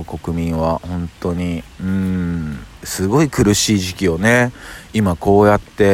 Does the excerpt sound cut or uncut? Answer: cut